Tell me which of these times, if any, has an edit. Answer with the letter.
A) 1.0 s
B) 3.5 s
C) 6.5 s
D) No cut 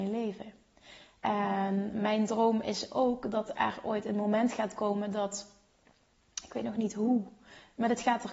D